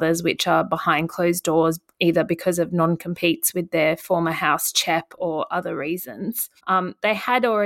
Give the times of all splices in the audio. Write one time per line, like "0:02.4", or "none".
0:06.6